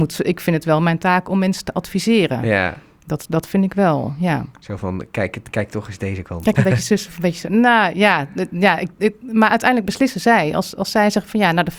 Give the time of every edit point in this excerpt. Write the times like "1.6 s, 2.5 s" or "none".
6.5 s